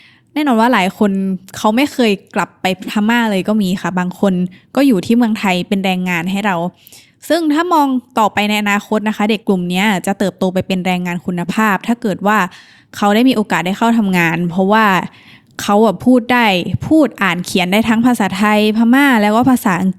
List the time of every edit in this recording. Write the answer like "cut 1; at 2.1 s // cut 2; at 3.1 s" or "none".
cut 1; at 9.4 s